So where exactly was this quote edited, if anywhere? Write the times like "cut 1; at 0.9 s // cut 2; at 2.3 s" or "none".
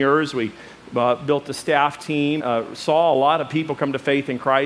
cut 1; at 2.4 s